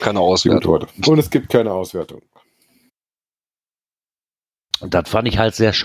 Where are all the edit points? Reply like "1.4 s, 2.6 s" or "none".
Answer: none